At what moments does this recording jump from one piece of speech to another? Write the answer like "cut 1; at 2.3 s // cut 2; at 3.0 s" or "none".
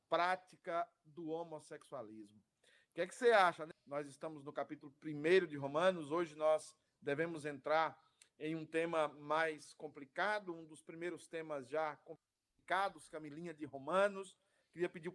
cut 1; at 3.7 s